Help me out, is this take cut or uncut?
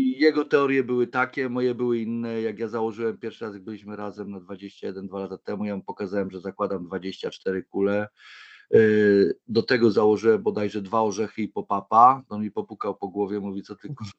uncut